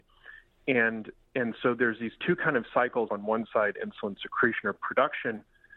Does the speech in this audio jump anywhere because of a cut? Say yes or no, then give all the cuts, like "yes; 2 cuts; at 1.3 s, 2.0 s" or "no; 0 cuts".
yes; 1 cut; at 3.1 s